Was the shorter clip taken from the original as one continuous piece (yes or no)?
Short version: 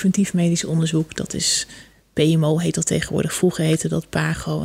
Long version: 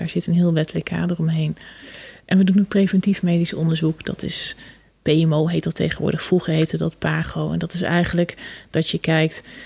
yes